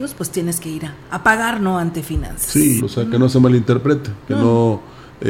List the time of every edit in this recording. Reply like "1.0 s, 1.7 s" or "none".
2.8 s